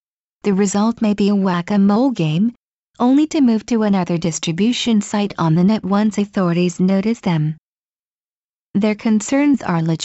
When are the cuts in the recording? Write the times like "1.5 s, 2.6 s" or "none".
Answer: 2.9 s, 8.7 s